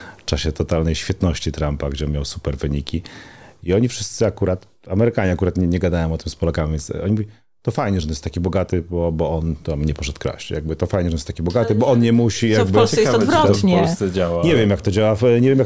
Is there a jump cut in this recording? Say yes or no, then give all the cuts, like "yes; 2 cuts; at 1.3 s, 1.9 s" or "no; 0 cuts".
no; 0 cuts